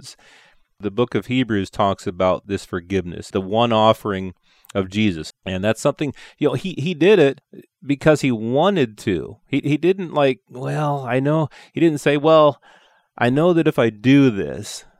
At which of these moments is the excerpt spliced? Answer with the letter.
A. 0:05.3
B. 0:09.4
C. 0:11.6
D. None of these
A